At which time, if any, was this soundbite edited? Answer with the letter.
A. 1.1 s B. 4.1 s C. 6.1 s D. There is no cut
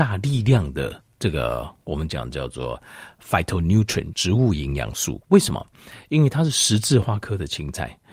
B